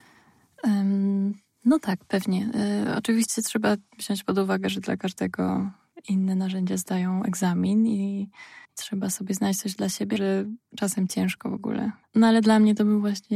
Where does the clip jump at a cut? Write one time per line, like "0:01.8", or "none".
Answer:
0:08.6
0:10.2
0:12.0